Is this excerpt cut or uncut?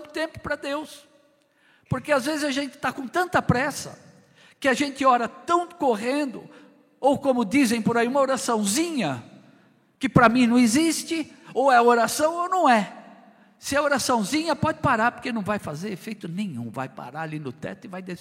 uncut